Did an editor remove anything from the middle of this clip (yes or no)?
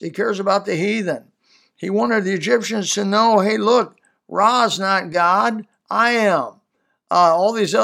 no